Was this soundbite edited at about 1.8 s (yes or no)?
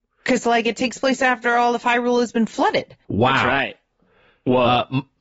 no